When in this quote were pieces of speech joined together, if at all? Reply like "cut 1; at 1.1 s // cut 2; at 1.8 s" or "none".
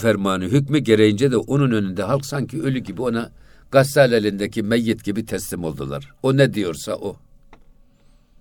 none